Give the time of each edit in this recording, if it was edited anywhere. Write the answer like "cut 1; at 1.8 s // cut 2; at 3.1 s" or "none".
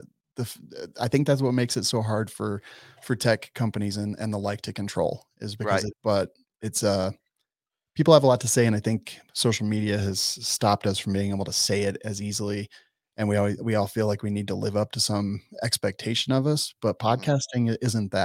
cut 1; at 5.9 s